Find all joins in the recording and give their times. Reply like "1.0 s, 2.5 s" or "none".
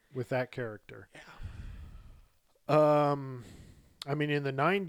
none